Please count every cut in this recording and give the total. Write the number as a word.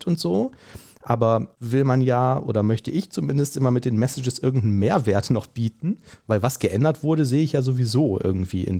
one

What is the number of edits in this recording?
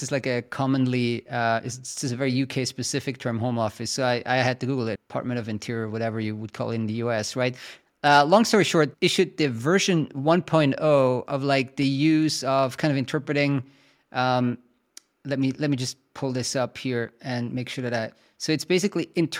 two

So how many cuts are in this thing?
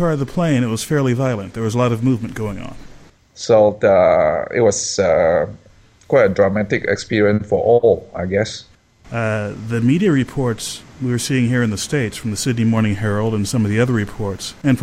two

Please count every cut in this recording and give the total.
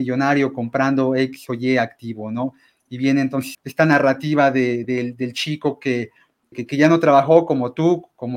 three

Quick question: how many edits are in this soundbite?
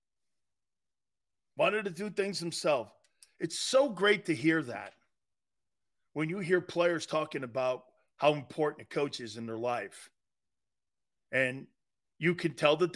zero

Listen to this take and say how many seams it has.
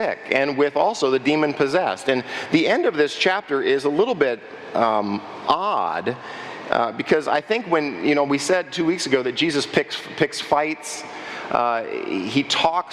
zero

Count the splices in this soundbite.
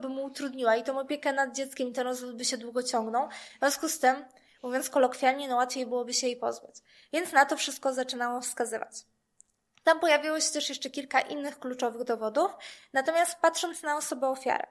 zero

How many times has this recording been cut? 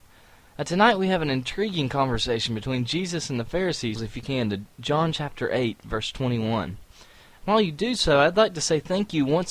one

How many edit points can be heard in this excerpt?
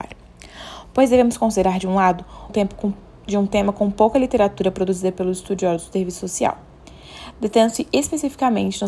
one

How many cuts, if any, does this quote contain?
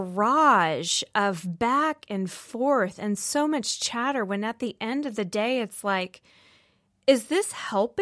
zero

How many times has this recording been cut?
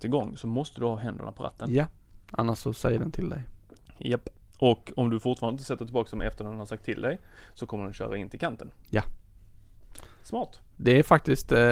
zero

